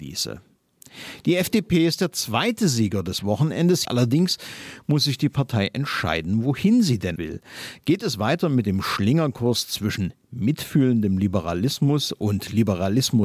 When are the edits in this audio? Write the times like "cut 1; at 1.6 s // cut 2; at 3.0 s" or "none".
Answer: cut 1; at 3.8 s // cut 2; at 7.2 s